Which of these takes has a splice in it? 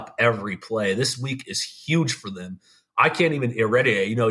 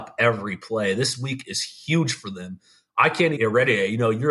second; 1 cut; at 3.4 s

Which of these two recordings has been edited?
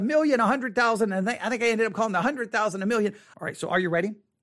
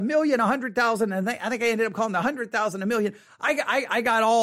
first; 1 cut; at 3.3 s

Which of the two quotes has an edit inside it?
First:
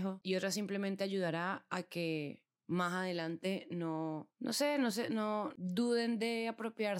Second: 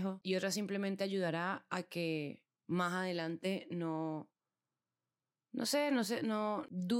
first; 1 cut; at 4.3 s

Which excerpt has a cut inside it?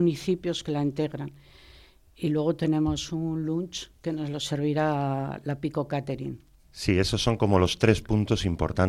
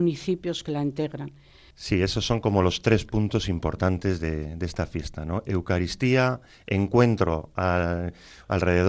second; 1 cut; at 1.7 s

